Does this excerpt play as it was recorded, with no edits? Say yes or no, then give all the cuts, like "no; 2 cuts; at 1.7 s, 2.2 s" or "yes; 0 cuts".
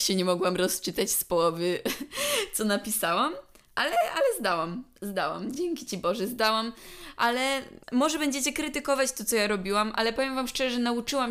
yes; 0 cuts